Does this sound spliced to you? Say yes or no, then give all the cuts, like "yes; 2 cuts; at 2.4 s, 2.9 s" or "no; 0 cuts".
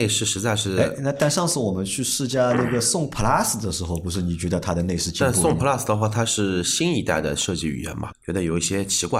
yes; 1 cut; at 8.1 s